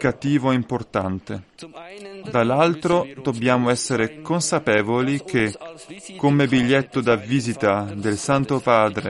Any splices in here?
yes; 1 cut; at 2.2 s

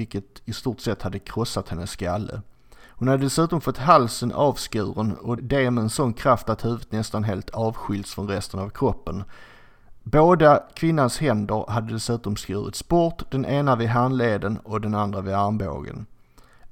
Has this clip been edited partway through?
yes; 1 cut; at 5.4 s

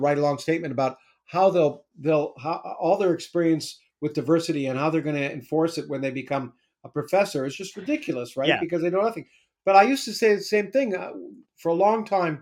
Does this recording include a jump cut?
yes; 1 cut; at 11.4 s

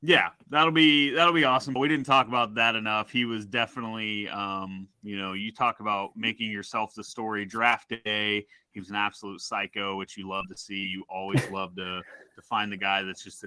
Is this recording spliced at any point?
yes; 2 cuts; at 1.8 s, 4.9 s

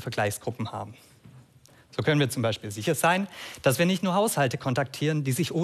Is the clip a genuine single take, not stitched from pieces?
yes; 0 cuts

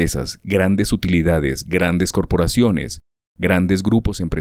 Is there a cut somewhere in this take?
no; 0 cuts

